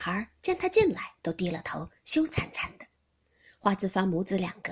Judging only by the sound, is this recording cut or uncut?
uncut